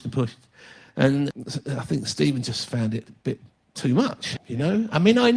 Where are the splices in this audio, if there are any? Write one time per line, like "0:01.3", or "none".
0:01.3
0:04.4